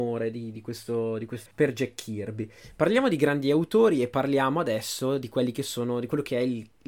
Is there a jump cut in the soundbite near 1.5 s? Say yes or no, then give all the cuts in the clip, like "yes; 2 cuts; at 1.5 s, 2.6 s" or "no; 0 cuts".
yes; 1 cut; at 1.5 s